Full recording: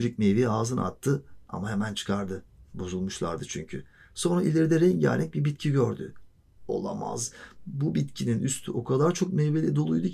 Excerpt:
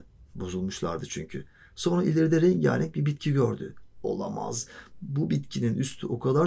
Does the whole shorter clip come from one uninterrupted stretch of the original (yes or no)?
no